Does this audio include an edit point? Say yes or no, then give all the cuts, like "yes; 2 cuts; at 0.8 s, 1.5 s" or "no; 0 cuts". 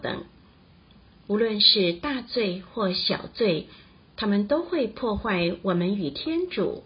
no; 0 cuts